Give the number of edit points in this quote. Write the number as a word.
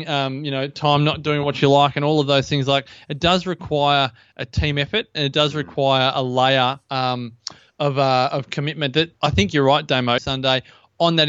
one